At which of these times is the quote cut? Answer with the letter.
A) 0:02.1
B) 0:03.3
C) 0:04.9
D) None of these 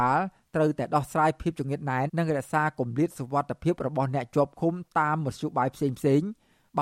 A